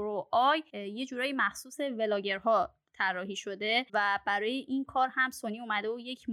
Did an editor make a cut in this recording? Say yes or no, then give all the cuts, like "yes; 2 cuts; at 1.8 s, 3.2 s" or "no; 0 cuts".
yes; 1 cut; at 3.9 s